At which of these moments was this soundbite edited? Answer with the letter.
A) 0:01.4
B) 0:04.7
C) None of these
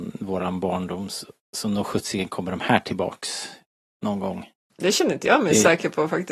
A